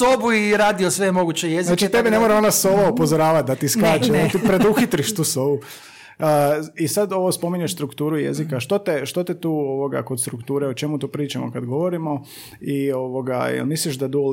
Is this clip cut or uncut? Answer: uncut